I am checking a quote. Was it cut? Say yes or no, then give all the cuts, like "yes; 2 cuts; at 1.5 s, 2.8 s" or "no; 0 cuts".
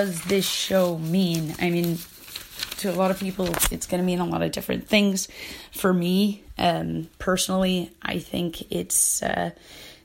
no; 0 cuts